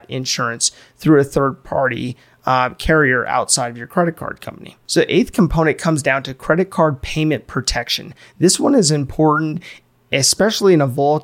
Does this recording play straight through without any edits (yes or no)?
yes